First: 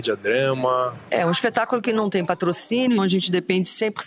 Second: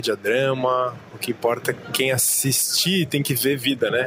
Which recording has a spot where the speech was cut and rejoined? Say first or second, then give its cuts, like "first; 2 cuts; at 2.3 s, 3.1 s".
first; 2 cuts; at 1.1 s, 3.0 s